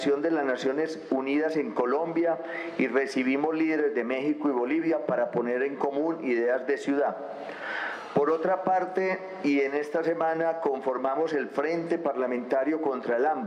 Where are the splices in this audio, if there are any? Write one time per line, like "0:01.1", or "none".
none